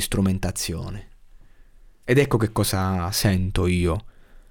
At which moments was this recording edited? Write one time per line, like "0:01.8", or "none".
0:02.0

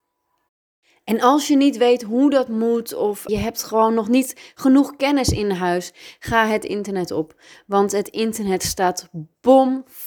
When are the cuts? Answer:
0:03.3

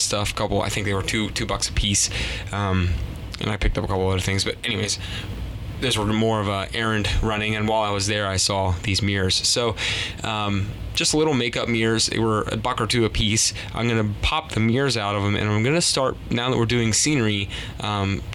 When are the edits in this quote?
none

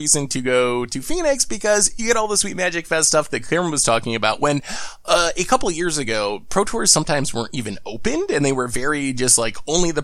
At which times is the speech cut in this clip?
none

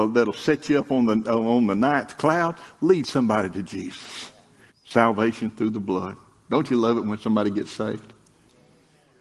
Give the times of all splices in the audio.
0:04.7

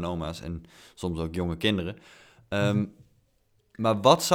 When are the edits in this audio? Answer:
none

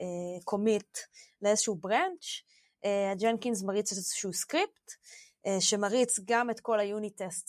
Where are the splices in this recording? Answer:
none

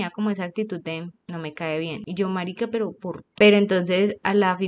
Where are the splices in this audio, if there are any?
0:03.4

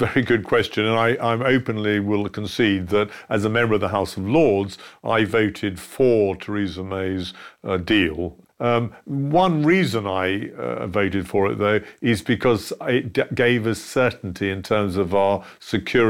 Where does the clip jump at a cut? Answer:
none

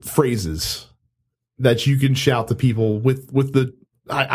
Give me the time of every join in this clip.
none

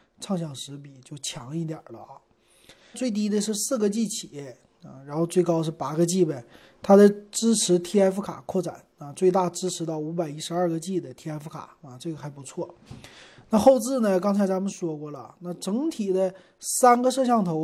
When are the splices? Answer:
0:02.9

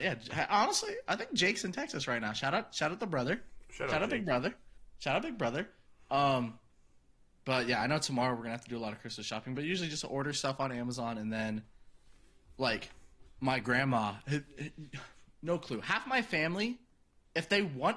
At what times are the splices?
none

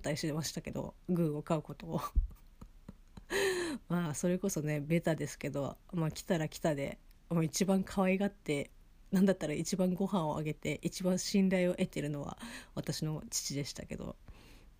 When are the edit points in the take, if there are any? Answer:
none

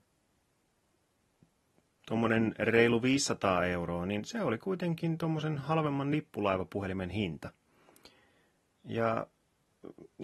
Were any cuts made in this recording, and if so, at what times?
none

